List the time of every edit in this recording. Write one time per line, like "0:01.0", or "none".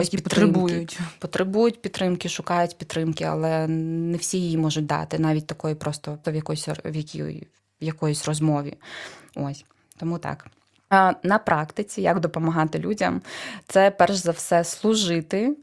0:06.2